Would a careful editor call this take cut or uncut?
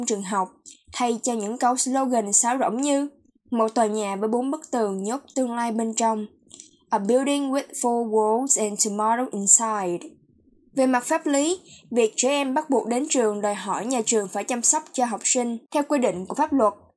cut